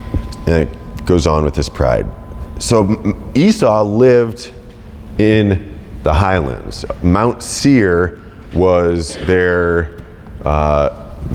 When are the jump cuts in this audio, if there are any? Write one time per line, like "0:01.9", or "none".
none